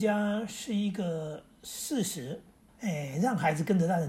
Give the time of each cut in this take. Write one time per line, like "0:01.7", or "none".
0:02.7